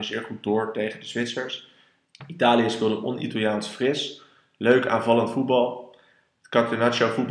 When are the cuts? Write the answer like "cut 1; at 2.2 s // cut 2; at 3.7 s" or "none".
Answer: cut 1; at 2.1 s